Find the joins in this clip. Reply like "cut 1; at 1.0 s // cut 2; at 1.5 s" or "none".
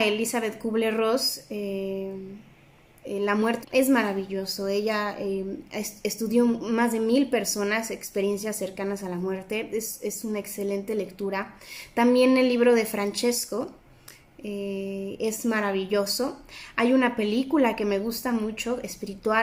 cut 1; at 3.6 s